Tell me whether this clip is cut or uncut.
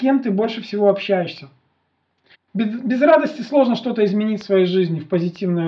cut